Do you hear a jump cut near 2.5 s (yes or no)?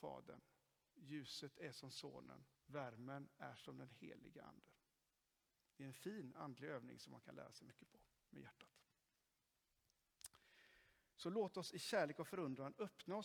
yes